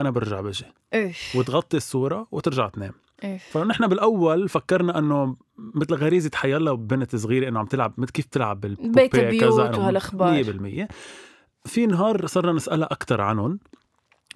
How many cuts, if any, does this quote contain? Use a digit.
0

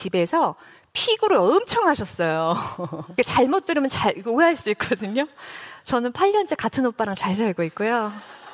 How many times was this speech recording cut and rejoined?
1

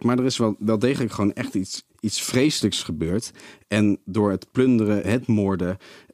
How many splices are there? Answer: 2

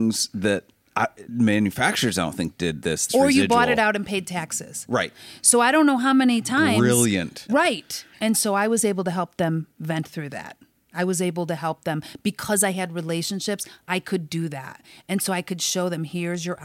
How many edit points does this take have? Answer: 3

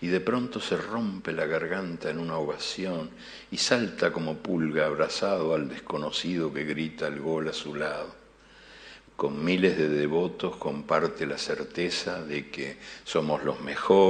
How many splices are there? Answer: 1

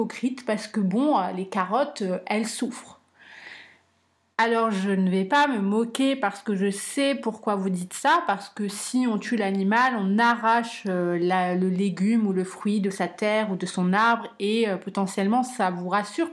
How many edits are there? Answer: 0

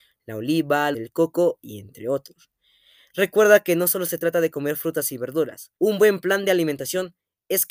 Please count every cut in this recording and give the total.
2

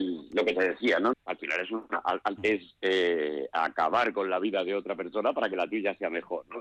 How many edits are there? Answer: 2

